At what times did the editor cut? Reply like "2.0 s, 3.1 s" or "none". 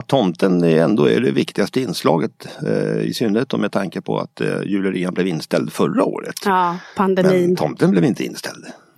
none